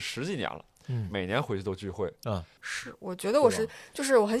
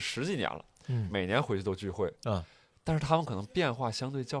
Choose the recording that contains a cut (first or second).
first